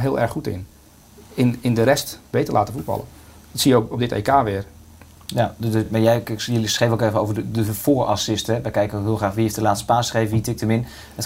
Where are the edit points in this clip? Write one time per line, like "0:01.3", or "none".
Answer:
none